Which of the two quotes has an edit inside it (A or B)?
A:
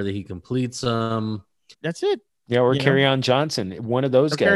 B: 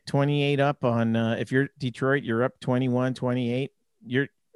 A